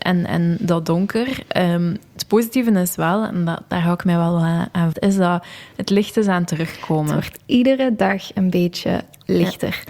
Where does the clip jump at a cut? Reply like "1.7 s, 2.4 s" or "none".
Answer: 4.9 s